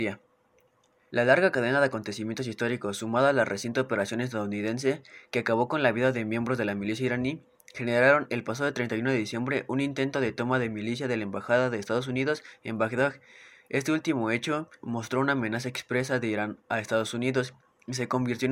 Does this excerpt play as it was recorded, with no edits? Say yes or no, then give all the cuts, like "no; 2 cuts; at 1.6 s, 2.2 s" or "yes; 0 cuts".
no; 2 cuts; at 1.1 s, 14.8 s